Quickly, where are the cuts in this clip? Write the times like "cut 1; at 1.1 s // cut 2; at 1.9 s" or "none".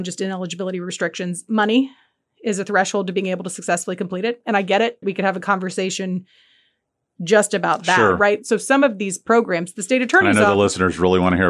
cut 1; at 5.0 s